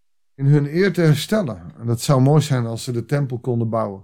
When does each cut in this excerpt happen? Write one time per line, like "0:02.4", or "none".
none